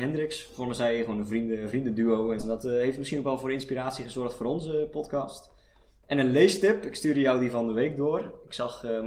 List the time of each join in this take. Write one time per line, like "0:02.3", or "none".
0:02.4

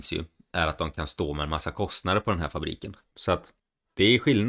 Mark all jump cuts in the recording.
0:03.0

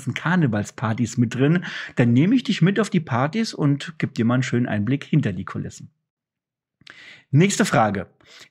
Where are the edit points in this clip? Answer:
none

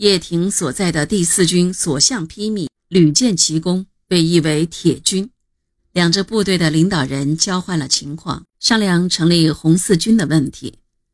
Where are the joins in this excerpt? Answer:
0:05.8
0:08.5

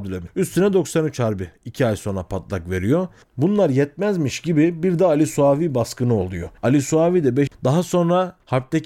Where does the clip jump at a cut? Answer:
0:03.2
0:07.5

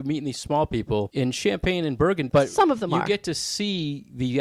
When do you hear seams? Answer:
0:02.3

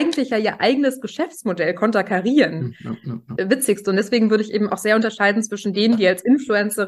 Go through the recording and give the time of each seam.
0:03.4

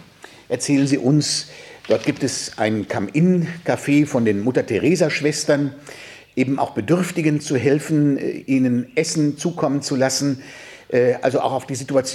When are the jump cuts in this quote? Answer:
none

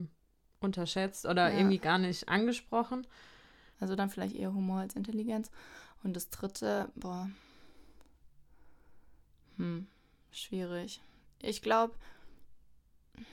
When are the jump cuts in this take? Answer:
0:03.7

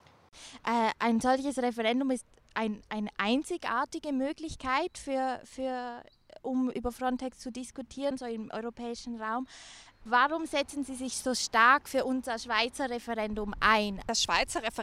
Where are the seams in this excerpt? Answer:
0:06.7

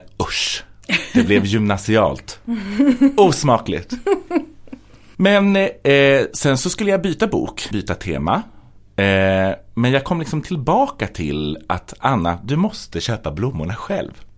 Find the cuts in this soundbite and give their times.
0:05.1
0:07.7

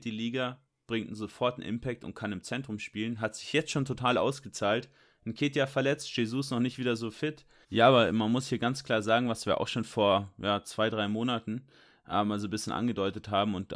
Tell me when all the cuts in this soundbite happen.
0:07.6

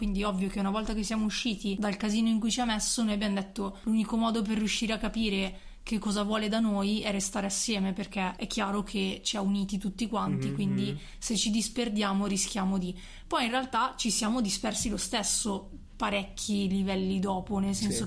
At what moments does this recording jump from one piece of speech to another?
none

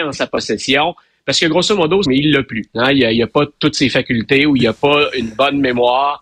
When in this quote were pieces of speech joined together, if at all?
0:02.0

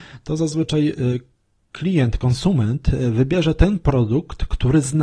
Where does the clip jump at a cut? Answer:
none

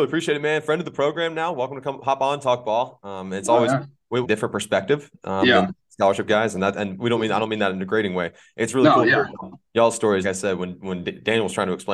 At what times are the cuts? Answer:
0:04.2
0:10.2

